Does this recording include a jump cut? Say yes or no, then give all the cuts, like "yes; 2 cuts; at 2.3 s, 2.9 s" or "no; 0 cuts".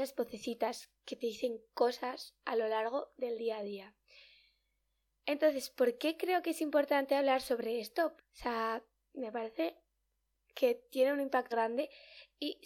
yes; 2 cuts; at 8.2 s, 11.5 s